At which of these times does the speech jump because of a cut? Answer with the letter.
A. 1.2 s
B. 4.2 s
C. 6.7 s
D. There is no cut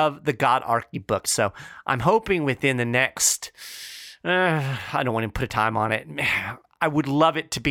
A